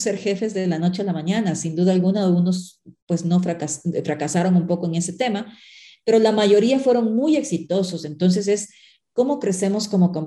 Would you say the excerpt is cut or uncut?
uncut